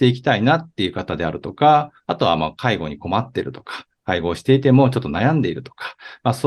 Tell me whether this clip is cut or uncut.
uncut